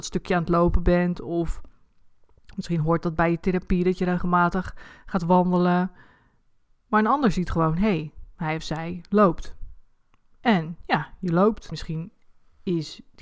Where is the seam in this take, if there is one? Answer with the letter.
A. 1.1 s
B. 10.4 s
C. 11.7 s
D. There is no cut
C